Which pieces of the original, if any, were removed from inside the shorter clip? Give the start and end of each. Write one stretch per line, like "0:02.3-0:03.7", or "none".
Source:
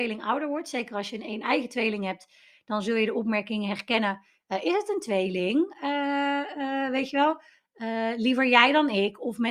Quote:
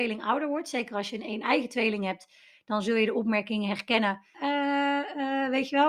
0:04.3-0:05.8